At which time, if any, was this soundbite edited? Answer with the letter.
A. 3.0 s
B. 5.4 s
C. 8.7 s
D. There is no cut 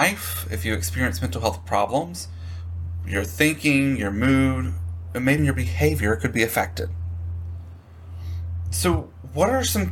B